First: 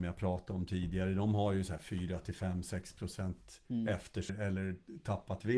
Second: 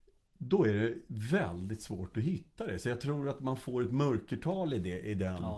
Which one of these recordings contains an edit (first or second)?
first